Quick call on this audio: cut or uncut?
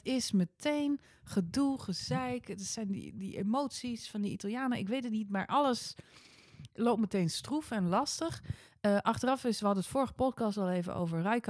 uncut